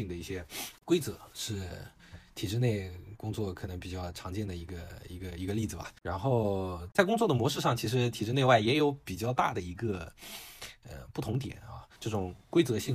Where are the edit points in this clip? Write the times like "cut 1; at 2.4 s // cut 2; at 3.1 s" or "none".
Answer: cut 1; at 12.0 s

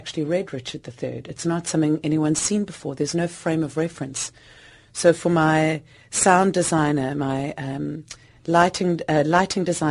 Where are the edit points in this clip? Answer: none

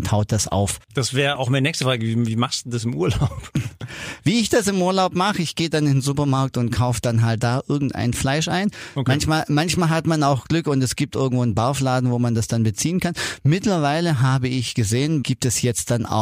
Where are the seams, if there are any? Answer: cut 1; at 15.2 s

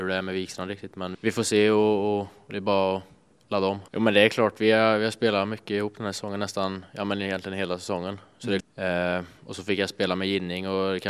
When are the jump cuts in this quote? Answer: cut 1; at 1.1 s // cut 2; at 3.9 s // cut 3; at 8.6 s

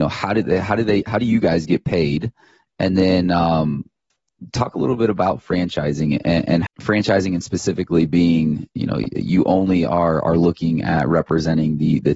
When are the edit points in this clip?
cut 1; at 6.7 s

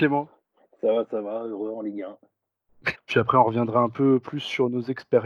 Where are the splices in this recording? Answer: cut 1; at 2.9 s

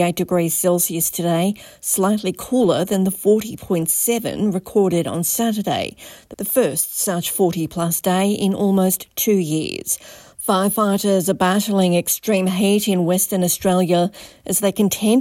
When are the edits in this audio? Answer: cut 1; at 10.3 s

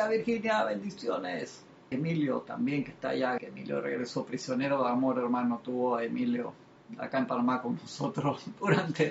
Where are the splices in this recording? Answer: cut 1; at 1.9 s // cut 2; at 3.4 s

